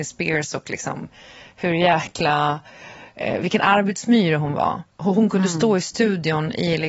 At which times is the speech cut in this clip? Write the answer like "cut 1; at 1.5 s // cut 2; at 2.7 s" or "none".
none